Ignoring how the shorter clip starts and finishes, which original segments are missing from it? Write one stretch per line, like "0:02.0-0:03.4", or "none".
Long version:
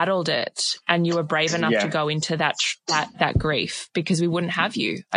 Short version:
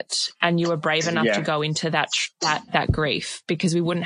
none